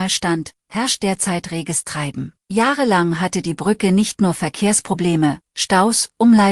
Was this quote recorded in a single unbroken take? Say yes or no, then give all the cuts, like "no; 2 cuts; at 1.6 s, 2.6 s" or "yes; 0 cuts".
no; 1 cut; at 2.4 s